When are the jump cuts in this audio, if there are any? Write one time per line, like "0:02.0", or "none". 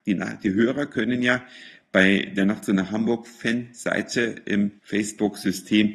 0:04.8